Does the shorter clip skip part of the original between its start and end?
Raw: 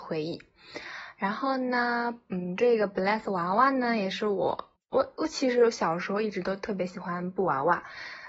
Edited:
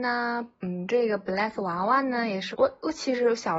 yes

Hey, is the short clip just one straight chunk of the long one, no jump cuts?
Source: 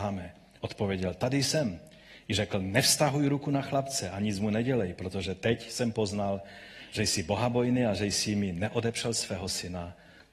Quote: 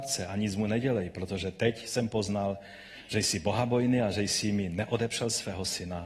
yes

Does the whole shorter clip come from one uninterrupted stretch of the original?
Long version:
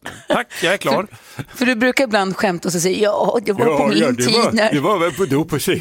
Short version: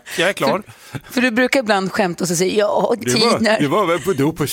no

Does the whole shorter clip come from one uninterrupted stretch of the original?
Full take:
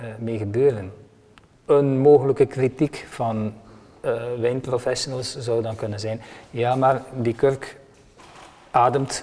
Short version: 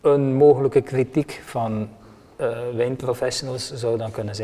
yes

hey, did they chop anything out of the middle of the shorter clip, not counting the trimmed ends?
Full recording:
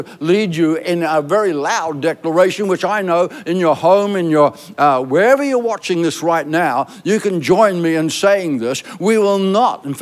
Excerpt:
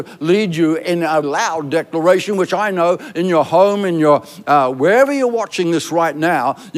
yes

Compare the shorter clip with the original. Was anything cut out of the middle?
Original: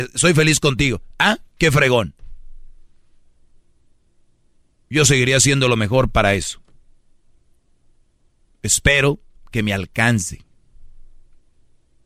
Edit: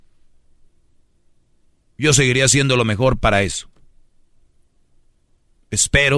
no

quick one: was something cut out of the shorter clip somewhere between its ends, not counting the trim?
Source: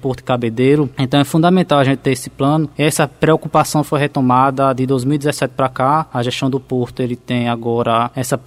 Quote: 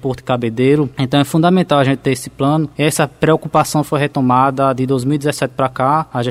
no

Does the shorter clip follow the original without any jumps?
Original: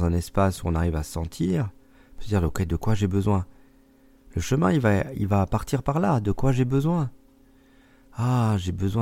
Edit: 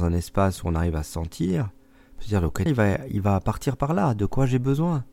no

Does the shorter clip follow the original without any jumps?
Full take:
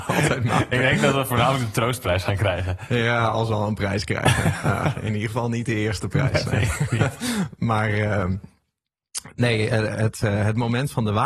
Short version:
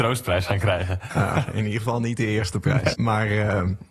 no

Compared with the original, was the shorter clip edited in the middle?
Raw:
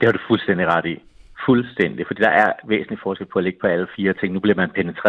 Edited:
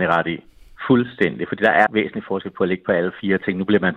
yes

